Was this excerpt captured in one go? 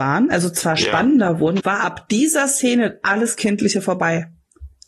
no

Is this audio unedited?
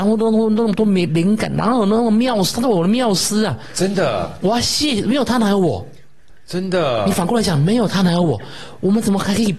yes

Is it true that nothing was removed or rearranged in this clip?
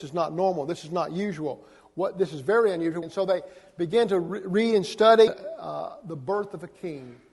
no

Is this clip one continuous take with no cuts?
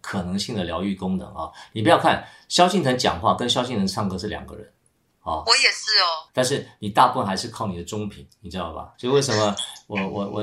no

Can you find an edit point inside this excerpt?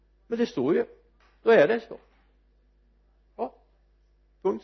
no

